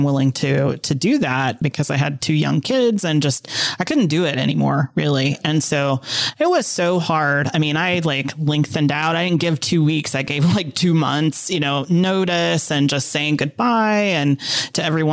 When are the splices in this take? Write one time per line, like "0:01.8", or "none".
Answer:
none